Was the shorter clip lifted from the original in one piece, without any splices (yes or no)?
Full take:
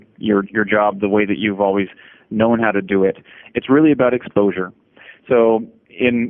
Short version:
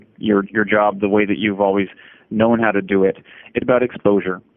no